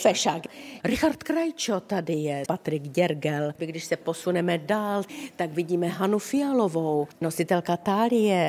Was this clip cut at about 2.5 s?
yes; 2 cuts; at 2.5 s, 3.6 s

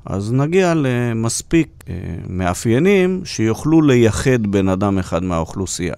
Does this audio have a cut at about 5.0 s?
no; 1 cut; at 1.8 s

